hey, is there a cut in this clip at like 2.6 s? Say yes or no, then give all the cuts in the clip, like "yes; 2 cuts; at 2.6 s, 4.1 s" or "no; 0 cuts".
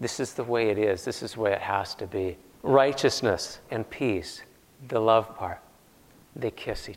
yes; 2 cuts; at 2.6 s, 3.7 s